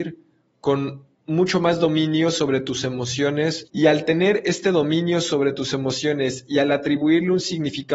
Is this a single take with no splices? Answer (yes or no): no